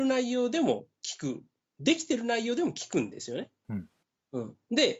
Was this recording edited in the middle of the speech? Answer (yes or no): no